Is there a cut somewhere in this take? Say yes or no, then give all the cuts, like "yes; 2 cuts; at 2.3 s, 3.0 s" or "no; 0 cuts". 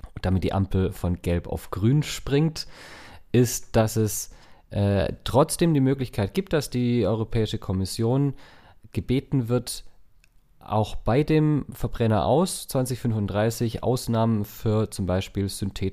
no; 0 cuts